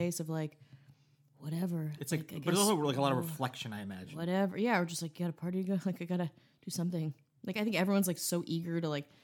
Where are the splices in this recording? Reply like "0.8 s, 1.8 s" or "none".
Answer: none